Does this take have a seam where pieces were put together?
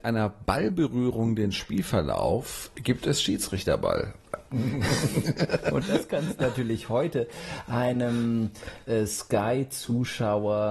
yes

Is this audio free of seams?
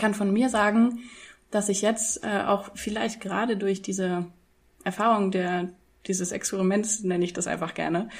yes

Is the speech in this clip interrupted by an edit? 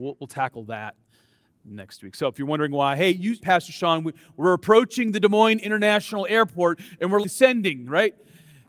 yes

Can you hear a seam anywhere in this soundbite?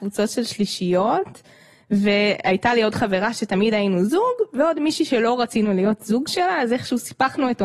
no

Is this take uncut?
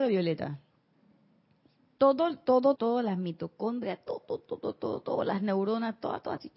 no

